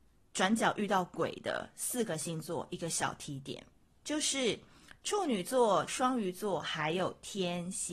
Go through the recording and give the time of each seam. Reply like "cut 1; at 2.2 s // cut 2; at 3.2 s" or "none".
cut 1; at 5.9 s